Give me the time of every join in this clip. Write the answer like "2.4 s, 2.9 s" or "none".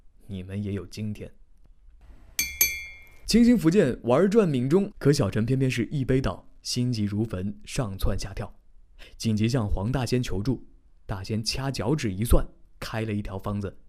4.9 s